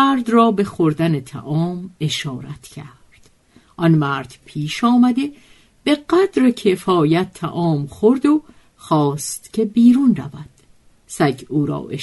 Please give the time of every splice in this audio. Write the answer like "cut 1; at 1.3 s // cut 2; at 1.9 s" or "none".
none